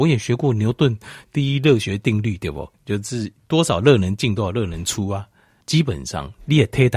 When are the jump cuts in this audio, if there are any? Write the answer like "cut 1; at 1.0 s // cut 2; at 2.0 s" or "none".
cut 1; at 2.7 s // cut 2; at 5.6 s